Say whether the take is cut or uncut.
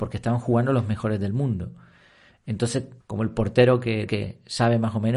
cut